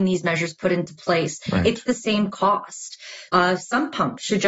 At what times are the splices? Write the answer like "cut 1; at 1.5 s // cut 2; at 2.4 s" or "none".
cut 1; at 3.3 s